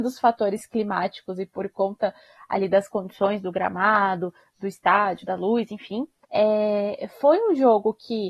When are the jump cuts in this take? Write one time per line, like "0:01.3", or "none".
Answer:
0:06.2